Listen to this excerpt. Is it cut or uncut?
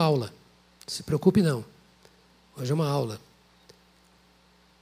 uncut